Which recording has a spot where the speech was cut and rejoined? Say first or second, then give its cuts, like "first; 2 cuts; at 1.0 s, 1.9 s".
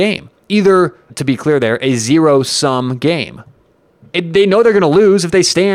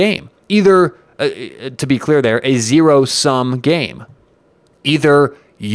first; 2 cuts; at 1.1 s, 4.0 s